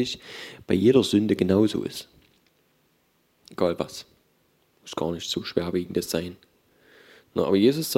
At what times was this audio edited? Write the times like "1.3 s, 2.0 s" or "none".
none